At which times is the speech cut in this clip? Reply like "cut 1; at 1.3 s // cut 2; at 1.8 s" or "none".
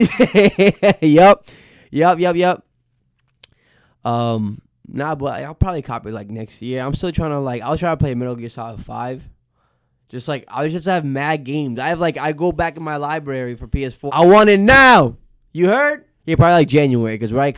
cut 1; at 14.1 s // cut 2; at 16.2 s